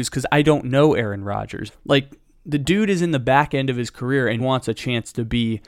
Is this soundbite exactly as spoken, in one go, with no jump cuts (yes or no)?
no